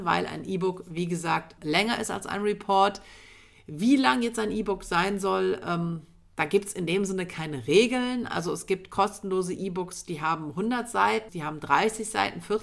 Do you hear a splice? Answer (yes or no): yes